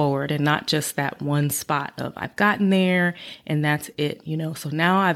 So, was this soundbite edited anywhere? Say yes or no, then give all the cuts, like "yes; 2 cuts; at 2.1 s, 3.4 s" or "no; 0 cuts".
no; 0 cuts